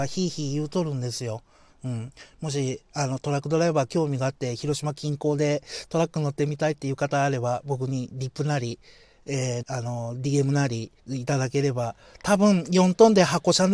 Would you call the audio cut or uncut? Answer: cut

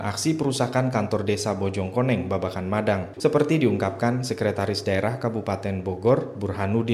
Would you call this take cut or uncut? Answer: cut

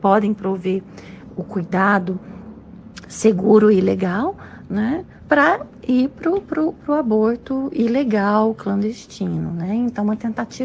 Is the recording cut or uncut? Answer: uncut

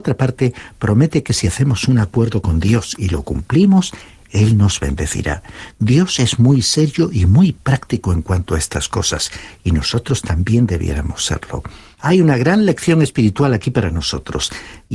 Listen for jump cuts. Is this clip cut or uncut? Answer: cut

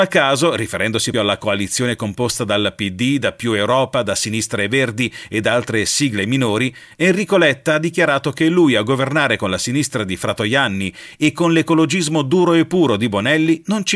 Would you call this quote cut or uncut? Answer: cut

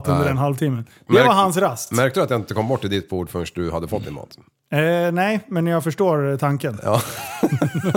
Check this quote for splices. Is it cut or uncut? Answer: uncut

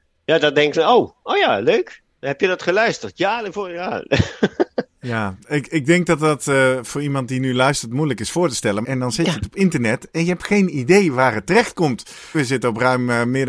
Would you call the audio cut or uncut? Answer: cut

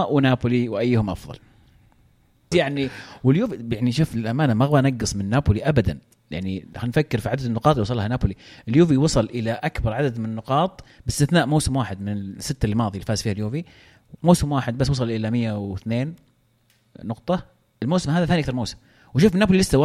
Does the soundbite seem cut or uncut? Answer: cut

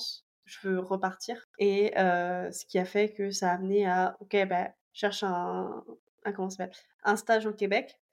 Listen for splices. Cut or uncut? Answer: cut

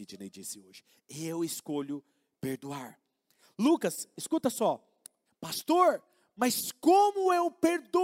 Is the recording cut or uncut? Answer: cut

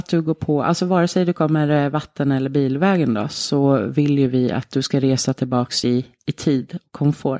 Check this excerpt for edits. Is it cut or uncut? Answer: uncut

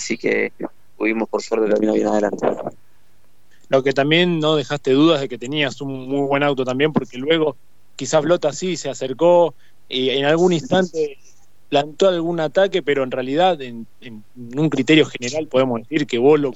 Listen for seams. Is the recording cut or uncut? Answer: uncut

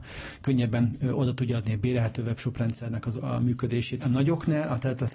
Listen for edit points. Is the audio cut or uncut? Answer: cut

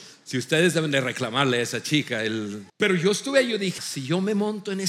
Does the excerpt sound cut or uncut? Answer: cut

